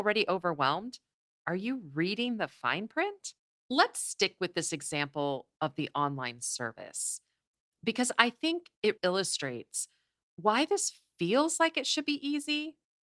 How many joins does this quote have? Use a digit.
2